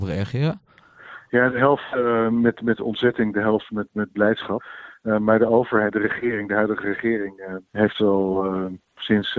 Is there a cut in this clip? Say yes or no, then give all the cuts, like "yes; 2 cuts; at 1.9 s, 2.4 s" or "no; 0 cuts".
yes; 1 cut; at 7.7 s